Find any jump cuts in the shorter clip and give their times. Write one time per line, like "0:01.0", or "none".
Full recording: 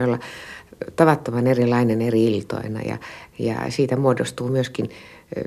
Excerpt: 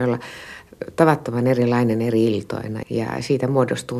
0:02.8